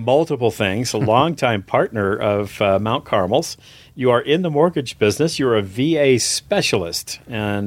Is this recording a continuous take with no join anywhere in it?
yes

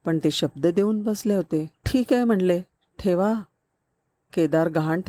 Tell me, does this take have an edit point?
yes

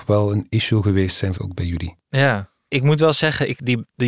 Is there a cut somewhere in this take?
yes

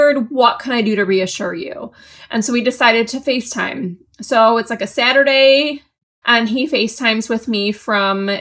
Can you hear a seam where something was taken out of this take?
yes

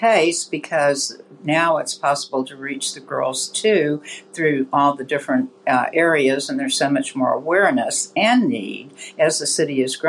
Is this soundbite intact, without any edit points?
yes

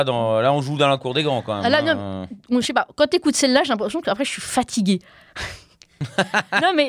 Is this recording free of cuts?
yes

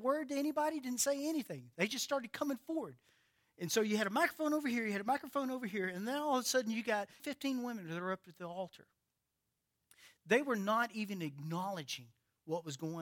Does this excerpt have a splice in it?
yes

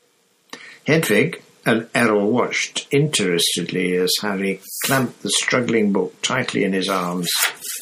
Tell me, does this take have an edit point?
no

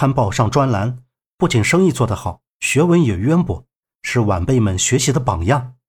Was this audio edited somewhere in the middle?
no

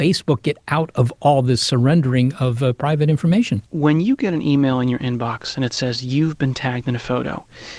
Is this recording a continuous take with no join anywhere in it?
no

